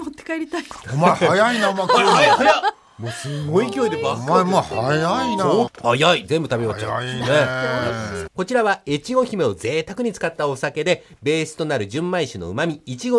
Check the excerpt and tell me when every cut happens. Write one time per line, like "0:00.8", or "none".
0:05.7
0:08.3